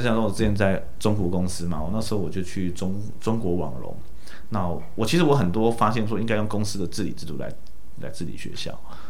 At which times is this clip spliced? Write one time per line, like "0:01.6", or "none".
none